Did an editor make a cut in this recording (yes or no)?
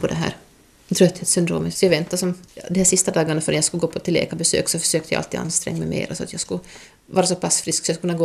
yes